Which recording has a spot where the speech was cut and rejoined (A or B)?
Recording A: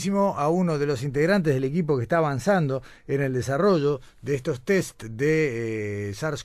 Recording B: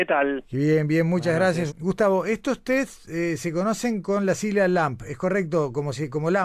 B